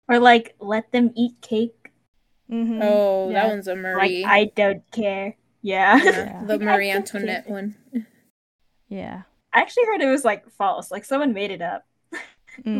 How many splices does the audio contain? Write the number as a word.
zero